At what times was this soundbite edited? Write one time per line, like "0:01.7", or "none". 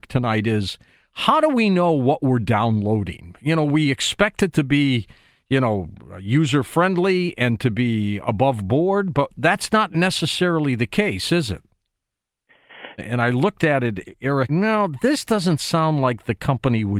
0:13.0
0:14.5